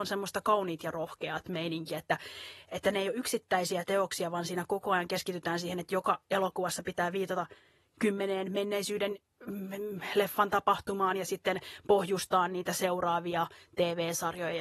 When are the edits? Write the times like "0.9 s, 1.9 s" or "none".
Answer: none